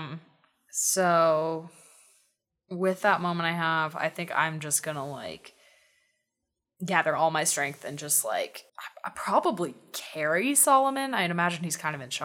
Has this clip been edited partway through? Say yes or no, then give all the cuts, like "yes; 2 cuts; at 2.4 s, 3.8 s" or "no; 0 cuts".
yes; 1 cut; at 8.7 s